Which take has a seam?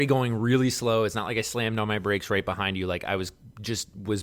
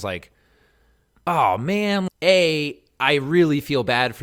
second; 1 cut; at 2.1 s

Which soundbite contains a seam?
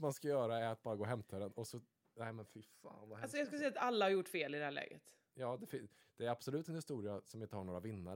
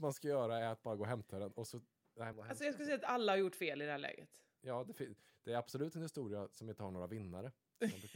second; 1 cut; at 2.3 s

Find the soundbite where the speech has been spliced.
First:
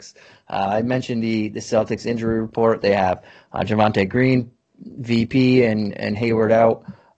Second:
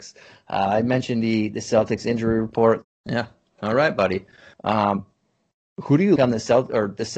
second; 3 cuts; at 2.8 s, 4.5 s, 6.2 s

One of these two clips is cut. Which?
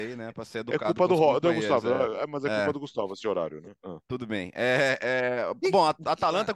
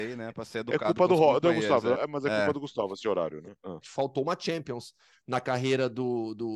second; 2 cuts; at 2.0 s, 3.8 s

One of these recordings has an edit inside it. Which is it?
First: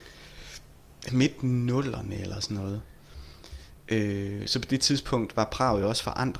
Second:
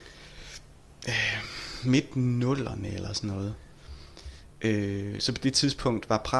first; 1 cut; at 1.1 s

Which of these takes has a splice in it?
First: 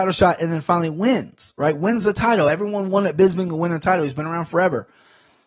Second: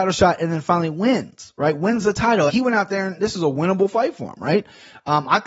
second; 1 cut; at 2.5 s

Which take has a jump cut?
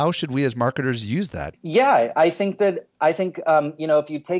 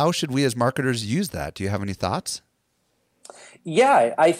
first; 1 cut; at 1.5 s

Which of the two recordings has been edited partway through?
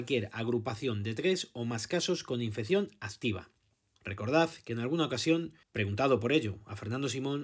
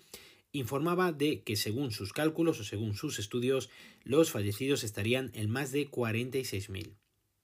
first; 2 cuts; at 4.0 s, 5.6 s

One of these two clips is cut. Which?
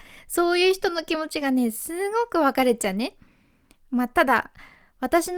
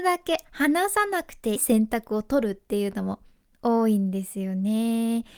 second; 1 cut; at 1.6 s

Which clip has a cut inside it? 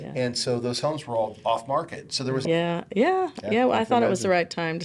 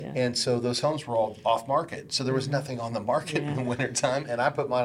first; 1 cut; at 2.4 s

